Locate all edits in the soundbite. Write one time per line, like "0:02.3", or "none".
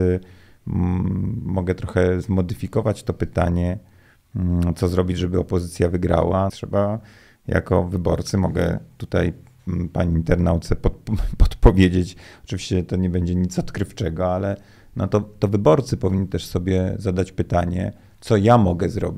0:06.5

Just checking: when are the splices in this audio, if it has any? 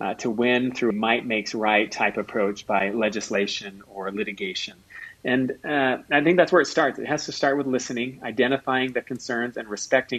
0:00.9

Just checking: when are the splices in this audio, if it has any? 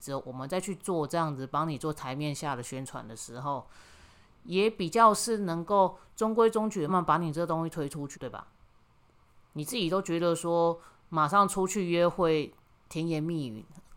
0:06.9
0:08.1

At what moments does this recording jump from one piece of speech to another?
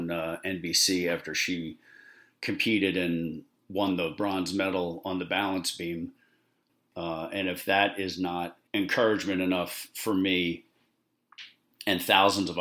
0:06.9
0:08.7

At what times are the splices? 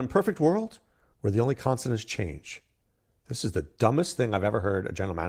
none

